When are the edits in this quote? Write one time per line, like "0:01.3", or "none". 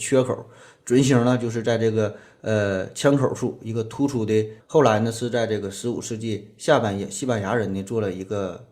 0:04.6